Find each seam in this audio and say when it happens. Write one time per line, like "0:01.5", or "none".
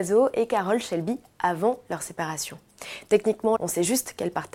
0:03.6